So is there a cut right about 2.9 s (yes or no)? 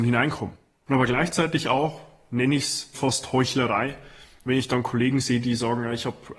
yes